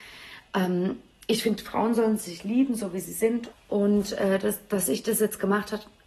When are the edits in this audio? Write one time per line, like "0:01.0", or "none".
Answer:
0:03.5